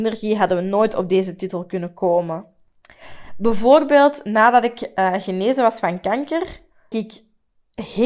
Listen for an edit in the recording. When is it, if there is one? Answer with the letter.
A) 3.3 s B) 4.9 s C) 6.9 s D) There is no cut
C